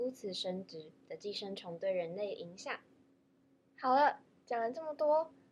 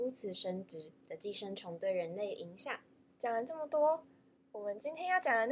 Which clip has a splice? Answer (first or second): second